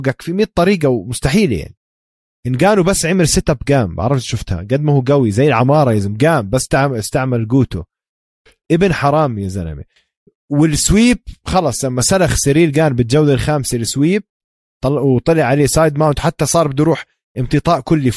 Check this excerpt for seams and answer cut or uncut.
uncut